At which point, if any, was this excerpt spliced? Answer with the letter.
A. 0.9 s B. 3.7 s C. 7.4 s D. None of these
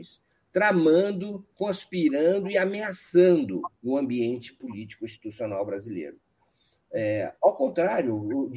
B